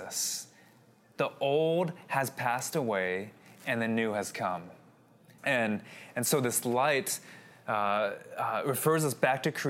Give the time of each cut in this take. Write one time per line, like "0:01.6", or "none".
0:05.4